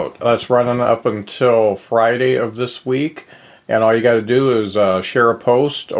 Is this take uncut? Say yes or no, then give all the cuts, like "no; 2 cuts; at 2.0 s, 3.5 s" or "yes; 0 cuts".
yes; 0 cuts